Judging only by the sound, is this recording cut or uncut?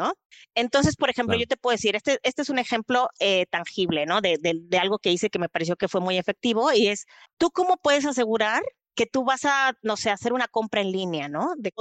uncut